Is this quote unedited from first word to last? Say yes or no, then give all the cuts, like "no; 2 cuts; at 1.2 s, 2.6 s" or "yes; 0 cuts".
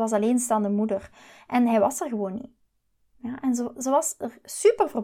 yes; 0 cuts